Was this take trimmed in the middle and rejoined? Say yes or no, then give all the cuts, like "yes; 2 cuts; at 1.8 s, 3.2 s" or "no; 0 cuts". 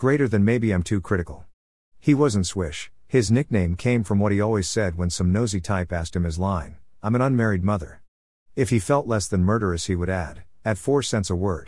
no; 0 cuts